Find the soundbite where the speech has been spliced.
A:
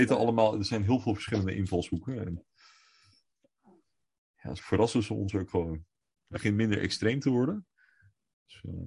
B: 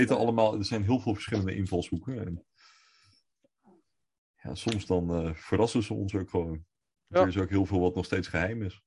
A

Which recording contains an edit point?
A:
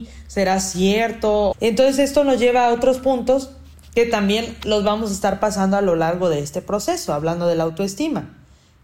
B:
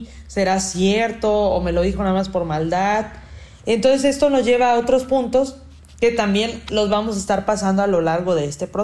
A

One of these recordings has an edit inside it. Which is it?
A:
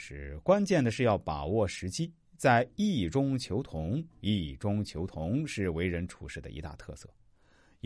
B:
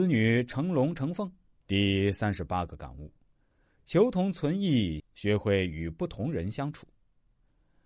B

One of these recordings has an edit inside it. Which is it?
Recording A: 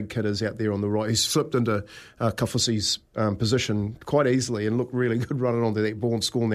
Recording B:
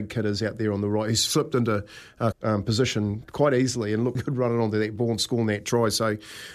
B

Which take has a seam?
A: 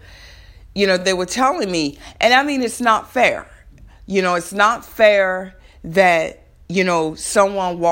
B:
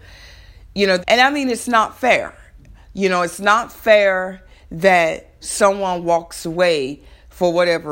B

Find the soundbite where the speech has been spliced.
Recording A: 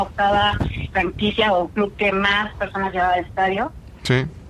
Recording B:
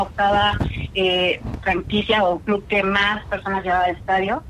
A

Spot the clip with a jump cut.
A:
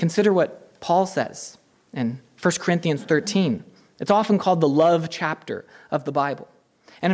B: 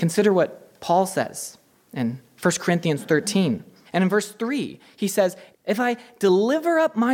B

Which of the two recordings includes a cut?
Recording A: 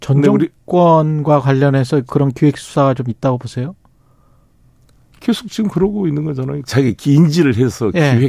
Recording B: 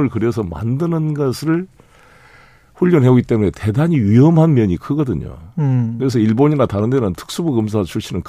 A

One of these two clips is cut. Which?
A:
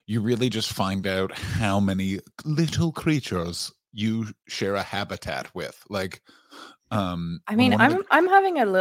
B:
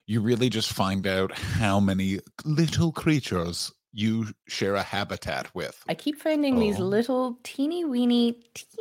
B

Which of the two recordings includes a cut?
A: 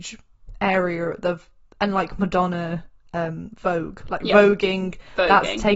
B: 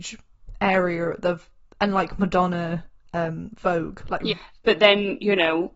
B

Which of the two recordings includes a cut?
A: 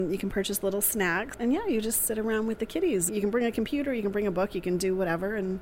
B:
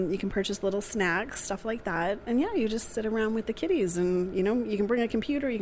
A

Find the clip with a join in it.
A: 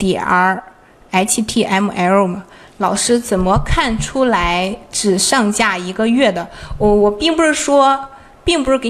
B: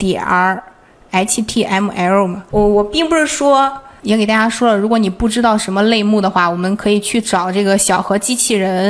B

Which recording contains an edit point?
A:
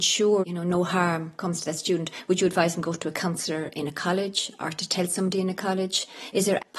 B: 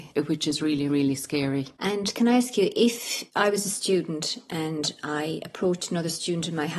B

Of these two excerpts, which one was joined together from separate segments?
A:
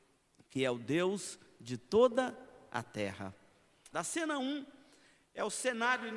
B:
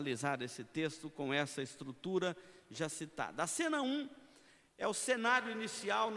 A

